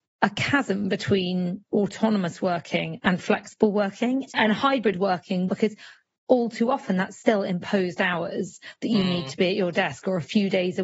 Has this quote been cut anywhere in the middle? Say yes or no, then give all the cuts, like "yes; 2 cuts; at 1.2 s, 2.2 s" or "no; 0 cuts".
yes; 2 cuts; at 4.3 s, 5.5 s